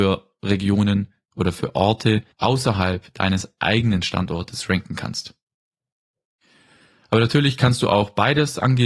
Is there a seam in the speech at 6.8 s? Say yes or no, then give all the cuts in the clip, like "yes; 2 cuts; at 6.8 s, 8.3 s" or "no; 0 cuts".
no; 1 cut; at 2.3 s